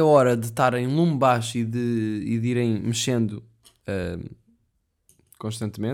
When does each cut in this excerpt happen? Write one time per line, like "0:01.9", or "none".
none